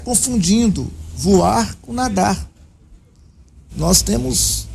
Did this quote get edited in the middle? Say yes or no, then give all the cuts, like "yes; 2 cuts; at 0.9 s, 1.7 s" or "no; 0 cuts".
yes; 1 cut; at 3.7 s